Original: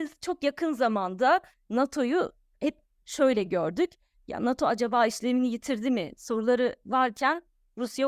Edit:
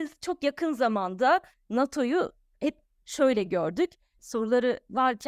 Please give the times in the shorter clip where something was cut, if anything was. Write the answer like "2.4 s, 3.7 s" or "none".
4.2 s